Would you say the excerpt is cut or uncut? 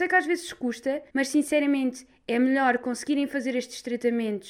cut